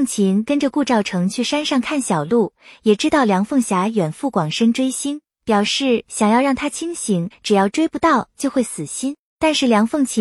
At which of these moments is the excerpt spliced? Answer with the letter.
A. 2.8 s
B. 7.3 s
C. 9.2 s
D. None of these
B